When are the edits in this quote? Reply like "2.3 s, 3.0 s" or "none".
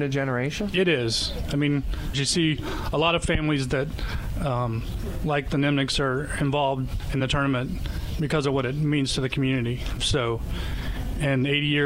2.1 s, 10.0 s